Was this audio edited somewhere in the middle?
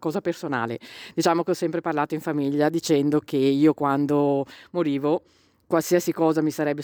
no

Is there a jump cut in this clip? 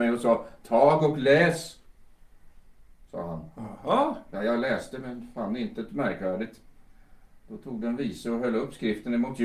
no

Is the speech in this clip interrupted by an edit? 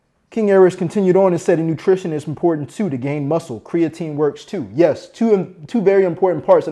no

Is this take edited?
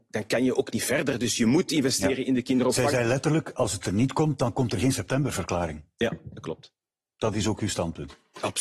no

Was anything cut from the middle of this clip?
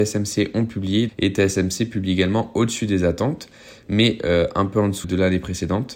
yes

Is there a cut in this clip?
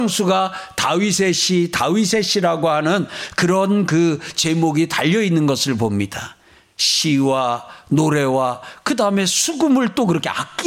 no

